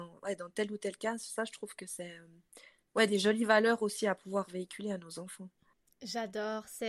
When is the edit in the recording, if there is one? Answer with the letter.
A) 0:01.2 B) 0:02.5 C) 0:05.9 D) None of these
D